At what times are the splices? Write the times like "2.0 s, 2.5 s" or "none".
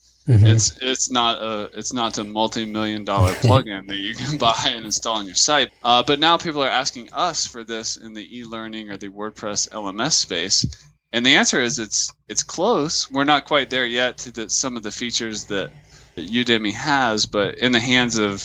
5.7 s, 16.2 s